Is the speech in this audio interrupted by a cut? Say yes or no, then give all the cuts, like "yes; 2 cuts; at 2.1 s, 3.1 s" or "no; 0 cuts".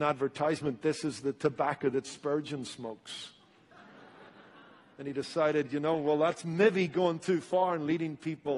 no; 0 cuts